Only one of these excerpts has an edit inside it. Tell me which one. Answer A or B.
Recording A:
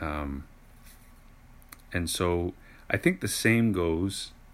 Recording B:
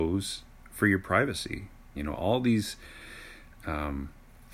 B